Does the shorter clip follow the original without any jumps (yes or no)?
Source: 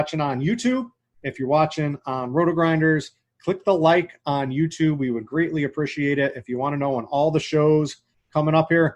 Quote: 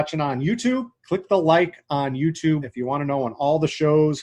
no